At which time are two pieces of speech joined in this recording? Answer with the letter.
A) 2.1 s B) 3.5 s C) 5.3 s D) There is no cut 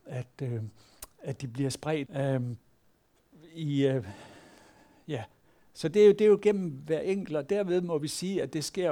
A